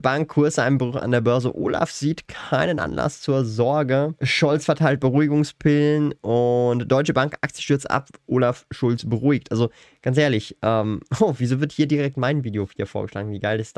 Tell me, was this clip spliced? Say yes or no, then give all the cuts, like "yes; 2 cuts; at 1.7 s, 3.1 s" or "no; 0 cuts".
no; 0 cuts